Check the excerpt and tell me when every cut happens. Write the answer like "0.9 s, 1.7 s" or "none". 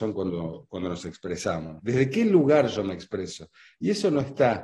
1.8 s